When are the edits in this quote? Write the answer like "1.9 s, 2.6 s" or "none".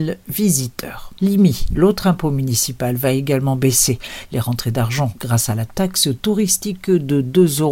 1.2 s, 4.3 s